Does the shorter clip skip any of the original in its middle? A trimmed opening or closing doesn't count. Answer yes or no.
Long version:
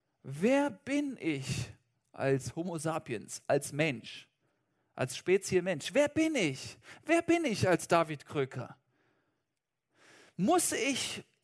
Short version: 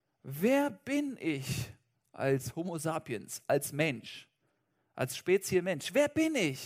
no